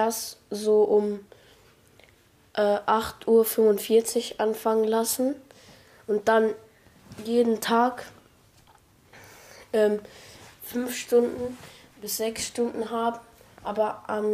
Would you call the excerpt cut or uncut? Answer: uncut